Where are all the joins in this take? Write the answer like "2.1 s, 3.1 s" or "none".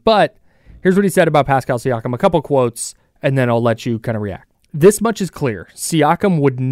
4.5 s